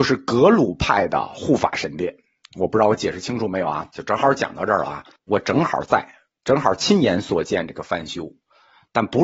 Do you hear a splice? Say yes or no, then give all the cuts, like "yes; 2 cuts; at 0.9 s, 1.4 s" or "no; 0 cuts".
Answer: yes; 2 cuts; at 3.9 s, 5.2 s